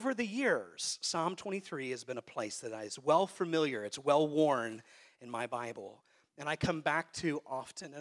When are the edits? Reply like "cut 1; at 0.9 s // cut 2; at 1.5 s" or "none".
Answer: none